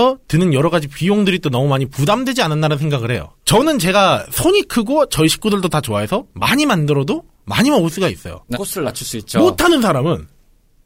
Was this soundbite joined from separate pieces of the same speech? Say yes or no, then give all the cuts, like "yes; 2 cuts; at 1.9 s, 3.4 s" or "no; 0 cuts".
yes; 1 cut; at 8.5 s